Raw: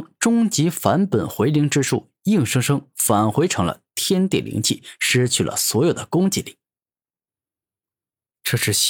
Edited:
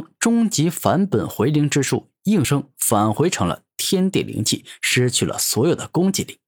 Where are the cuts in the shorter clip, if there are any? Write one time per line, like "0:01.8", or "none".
0:02.4